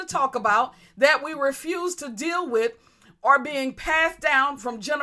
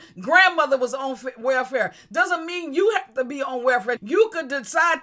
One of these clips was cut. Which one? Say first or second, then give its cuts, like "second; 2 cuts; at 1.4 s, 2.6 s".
second; 1 cut; at 4.0 s